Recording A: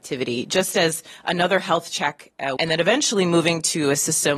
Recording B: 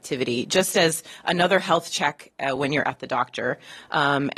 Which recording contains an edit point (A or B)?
A